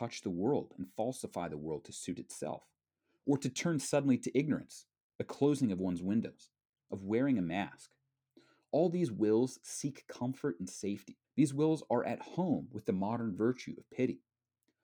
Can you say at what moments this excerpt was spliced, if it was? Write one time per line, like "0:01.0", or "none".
0:06.8
0:11.2